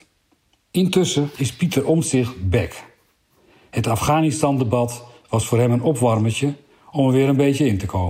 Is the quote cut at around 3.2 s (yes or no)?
no